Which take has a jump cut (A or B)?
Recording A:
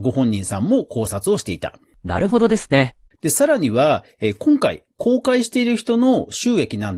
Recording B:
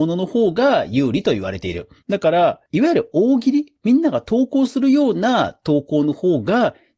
A